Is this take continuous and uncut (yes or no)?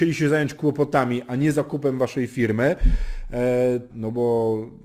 no